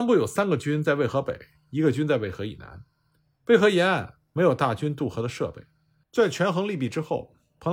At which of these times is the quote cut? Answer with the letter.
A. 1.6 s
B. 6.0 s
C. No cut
B